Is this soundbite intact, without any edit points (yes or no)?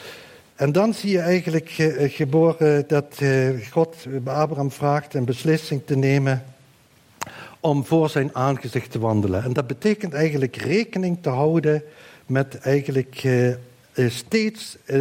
yes